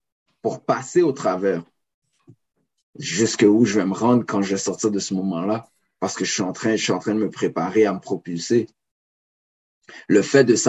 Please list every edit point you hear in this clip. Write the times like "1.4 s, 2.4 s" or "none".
2.8 s